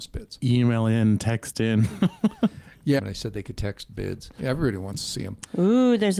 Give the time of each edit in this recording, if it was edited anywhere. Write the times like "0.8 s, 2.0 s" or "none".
3.0 s, 4.4 s

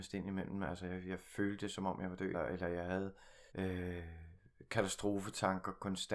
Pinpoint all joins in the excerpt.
2.3 s, 3.5 s

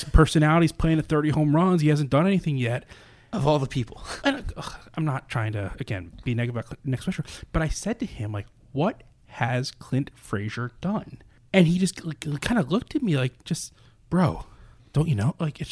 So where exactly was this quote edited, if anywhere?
4.2 s

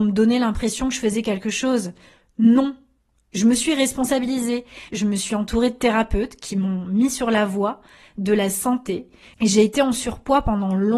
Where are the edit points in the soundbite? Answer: 4.9 s, 9.3 s

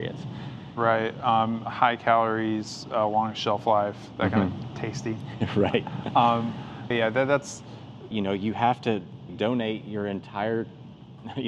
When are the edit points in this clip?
6.9 s, 8.1 s, 9.3 s

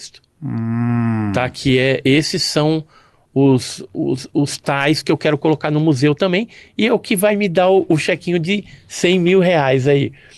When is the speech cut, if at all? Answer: none

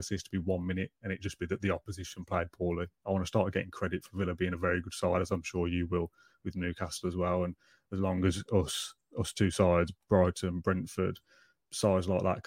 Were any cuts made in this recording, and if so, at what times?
none

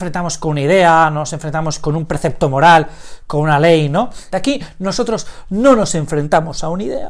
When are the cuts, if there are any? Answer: 4.3 s

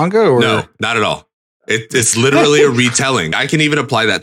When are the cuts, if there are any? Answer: 3.3 s

